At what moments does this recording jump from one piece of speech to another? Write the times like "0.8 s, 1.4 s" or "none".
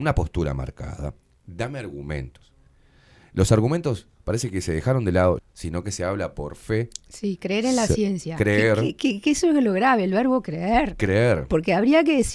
5.4 s

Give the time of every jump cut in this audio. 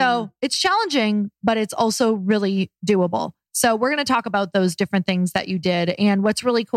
none

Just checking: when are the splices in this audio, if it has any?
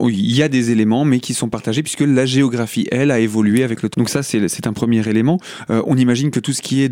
3.9 s

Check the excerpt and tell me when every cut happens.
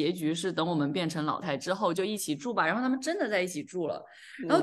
1.4 s

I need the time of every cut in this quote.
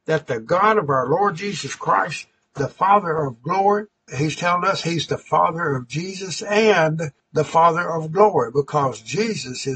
4.1 s, 7.2 s

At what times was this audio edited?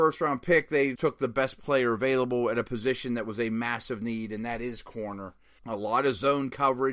1.0 s, 5.6 s

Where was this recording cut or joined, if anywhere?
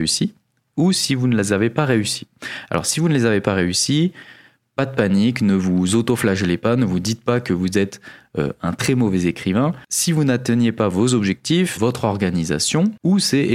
11.8 s

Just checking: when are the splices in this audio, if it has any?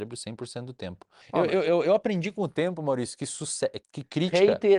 1.2 s, 3.8 s

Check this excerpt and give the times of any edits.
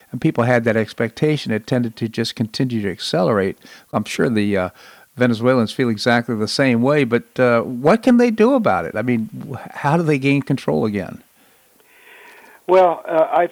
none

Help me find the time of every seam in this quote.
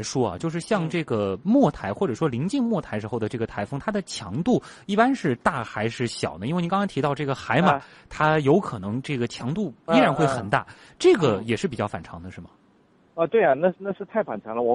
none

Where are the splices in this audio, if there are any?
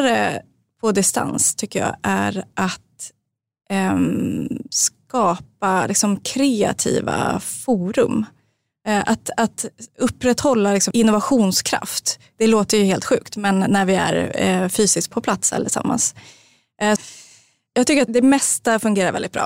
10.9 s, 12.4 s, 17.0 s

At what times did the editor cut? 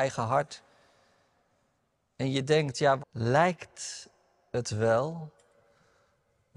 3.0 s

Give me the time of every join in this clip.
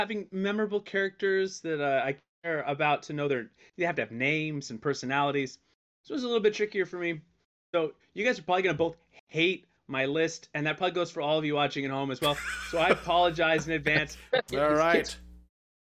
14.4 s

